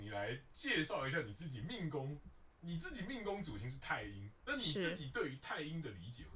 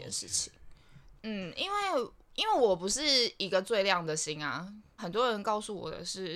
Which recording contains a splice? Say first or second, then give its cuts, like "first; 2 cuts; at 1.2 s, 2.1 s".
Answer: second; 2 cuts; at 1.2 s, 5.0 s